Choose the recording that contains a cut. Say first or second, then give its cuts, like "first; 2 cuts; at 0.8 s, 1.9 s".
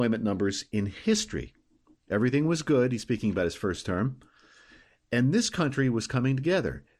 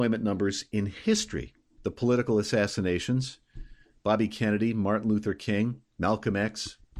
second; 1 cut; at 1.8 s